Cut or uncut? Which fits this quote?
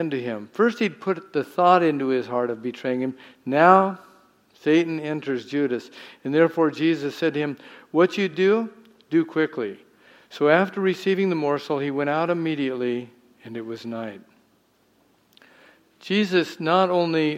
uncut